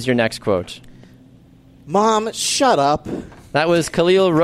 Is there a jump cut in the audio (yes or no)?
no